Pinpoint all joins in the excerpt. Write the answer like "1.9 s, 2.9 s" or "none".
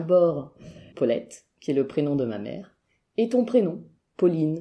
0.9 s